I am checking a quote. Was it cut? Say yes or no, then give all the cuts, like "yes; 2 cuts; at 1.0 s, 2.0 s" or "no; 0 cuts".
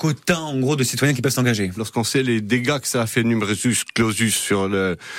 yes; 1 cut; at 1.8 s